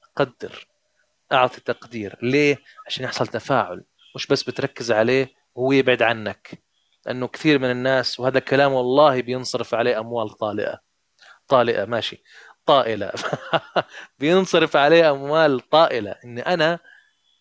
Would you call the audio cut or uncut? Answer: uncut